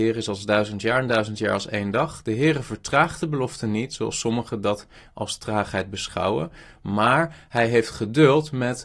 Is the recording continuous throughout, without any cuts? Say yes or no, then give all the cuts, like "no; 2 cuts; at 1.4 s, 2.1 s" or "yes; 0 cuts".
yes; 0 cuts